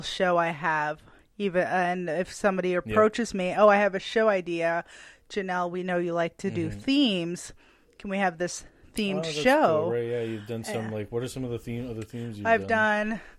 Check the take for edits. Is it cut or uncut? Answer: uncut